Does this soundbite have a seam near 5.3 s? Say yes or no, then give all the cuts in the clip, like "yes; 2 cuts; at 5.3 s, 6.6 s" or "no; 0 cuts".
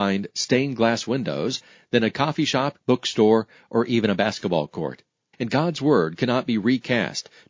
yes; 2 cuts; at 2.8 s, 5.3 s